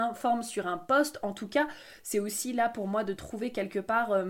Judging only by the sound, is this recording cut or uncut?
uncut